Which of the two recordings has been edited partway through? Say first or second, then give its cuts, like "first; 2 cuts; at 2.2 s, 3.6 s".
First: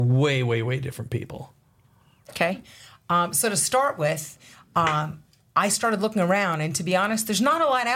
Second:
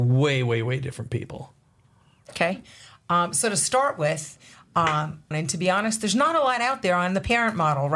second; 1 cut; at 5.3 s